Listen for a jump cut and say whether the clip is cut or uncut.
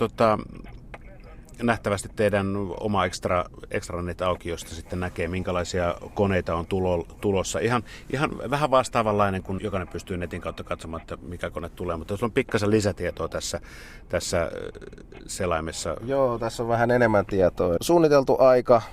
cut